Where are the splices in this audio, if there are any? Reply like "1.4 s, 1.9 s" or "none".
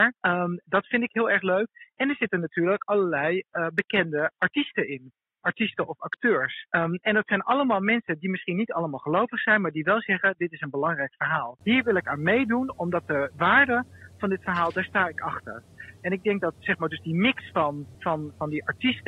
17.9 s